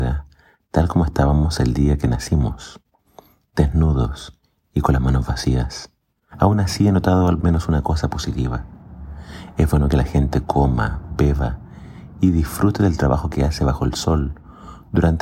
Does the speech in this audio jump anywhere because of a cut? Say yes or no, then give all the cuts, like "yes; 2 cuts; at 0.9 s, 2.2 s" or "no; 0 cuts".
yes; 1 cut; at 6.3 s